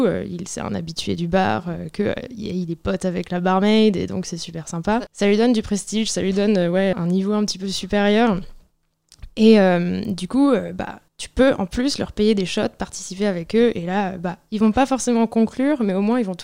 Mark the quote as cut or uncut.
cut